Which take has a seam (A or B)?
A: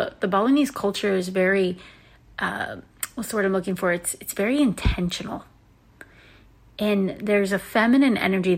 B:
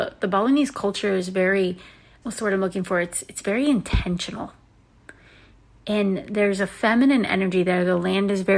B